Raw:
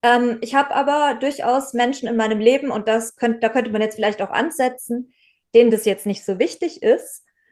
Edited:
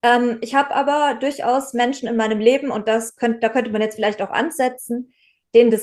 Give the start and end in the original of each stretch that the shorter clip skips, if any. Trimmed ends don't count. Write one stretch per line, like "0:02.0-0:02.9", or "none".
none